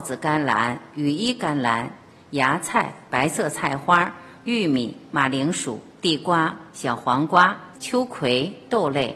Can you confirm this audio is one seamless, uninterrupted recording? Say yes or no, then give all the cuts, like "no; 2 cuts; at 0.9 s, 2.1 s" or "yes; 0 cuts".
no; 2 cuts; at 6.7 s, 7.7 s